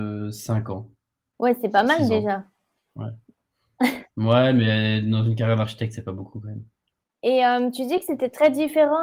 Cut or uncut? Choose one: uncut